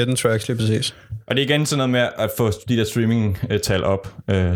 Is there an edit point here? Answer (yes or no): no